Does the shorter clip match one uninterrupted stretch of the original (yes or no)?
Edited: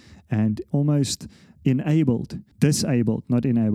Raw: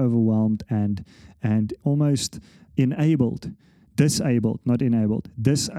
no